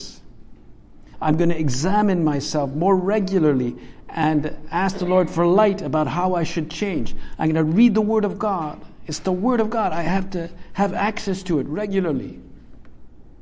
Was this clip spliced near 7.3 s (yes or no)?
yes